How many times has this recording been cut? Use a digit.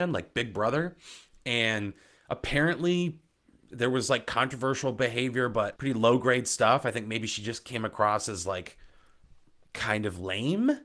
1